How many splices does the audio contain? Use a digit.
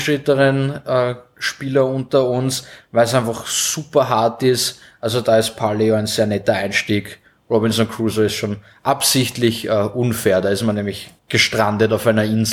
1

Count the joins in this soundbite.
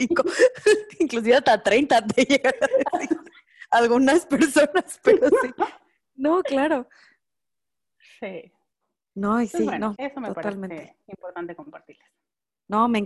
1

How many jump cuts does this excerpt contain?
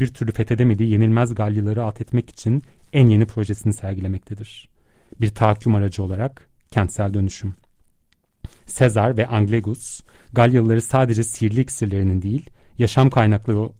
1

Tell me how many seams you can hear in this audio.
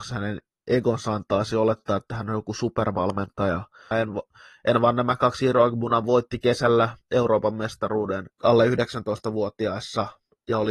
2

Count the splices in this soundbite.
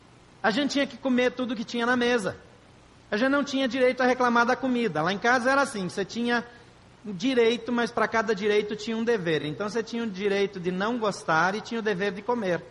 0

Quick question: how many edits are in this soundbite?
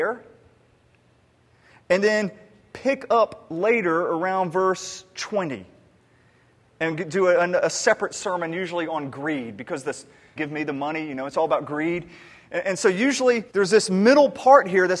2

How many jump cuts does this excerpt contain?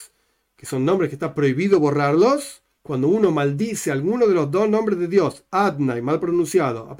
1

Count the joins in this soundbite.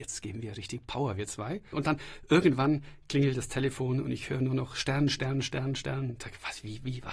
1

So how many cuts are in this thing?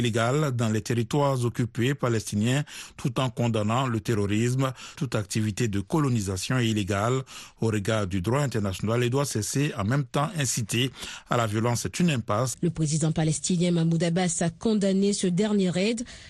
2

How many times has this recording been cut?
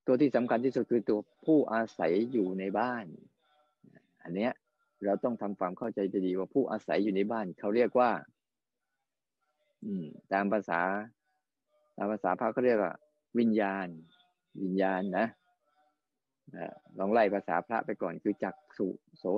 0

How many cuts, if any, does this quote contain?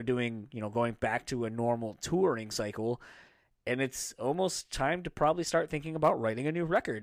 0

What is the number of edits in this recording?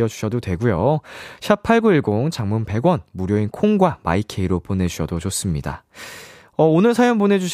1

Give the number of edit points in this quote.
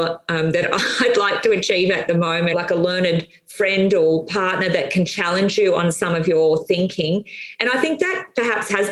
1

